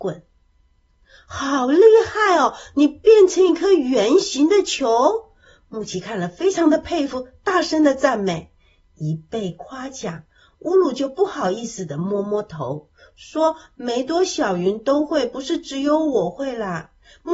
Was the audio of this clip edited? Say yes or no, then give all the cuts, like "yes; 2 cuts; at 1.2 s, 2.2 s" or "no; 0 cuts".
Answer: no; 0 cuts